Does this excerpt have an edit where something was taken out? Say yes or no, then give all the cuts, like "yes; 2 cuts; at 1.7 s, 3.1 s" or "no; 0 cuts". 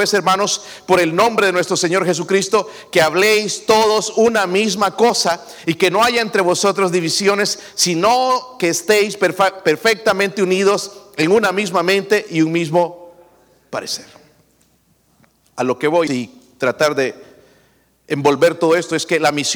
yes; 1 cut; at 16.1 s